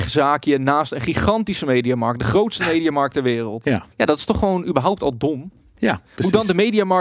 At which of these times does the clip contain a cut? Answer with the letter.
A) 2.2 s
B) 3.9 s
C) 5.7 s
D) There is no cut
B